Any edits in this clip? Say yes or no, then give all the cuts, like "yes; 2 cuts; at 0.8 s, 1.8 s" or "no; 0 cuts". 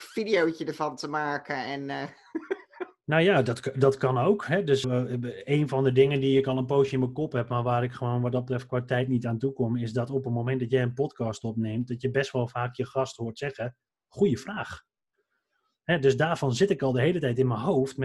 yes; 1 cut; at 4.8 s